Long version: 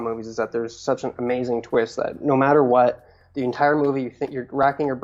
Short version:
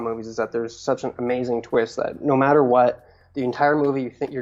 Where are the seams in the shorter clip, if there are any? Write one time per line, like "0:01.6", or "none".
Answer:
none